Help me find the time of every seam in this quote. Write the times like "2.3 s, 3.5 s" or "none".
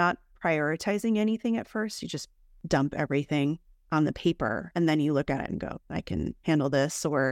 5.8 s